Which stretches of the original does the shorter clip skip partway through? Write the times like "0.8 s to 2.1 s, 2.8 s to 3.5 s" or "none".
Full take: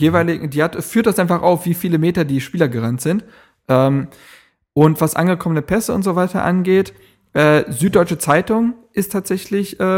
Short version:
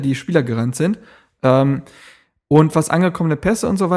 none